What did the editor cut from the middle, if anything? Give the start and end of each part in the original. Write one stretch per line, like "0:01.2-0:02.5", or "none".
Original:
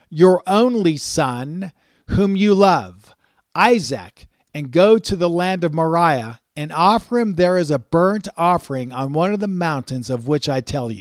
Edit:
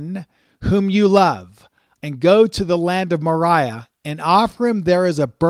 0:03.4-0:04.5